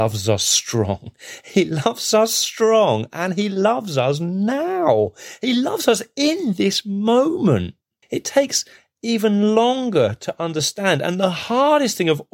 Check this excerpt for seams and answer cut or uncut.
cut